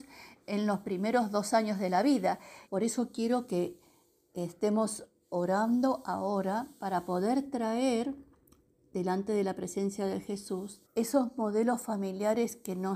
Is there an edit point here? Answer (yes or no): yes